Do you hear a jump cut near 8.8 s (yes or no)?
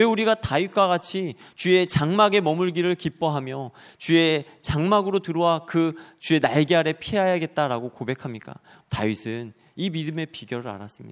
yes